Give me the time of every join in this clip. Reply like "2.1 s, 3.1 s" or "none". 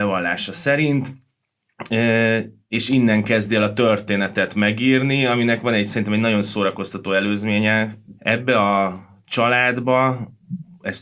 8.2 s